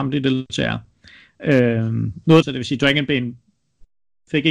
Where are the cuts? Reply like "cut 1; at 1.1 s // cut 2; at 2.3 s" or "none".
cut 1; at 2.4 s